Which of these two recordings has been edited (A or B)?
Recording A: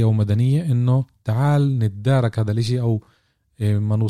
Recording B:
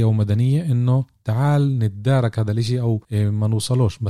B